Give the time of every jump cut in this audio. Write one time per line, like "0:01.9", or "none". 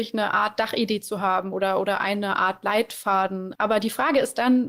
0:03.6